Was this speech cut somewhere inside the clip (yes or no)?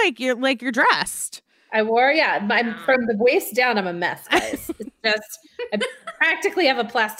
no